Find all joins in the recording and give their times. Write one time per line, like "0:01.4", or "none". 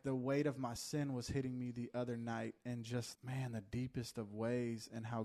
0:03.1